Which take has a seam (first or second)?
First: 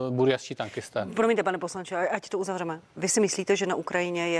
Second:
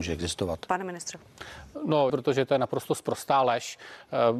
second